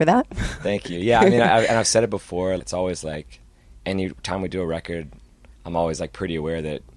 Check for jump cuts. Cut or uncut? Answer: cut